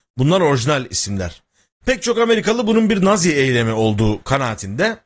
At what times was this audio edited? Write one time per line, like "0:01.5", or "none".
0:01.8